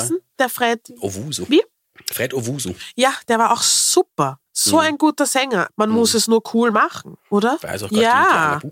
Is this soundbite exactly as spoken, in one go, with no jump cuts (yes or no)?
no